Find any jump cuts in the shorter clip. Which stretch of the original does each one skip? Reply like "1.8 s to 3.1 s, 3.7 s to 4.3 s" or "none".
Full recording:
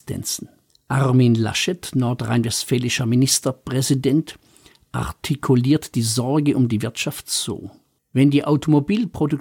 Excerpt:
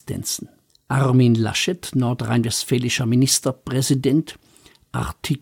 none